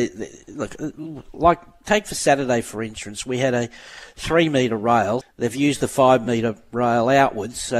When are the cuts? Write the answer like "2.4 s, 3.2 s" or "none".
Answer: 5.2 s